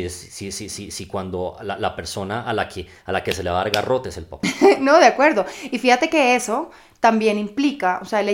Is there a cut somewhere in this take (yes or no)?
no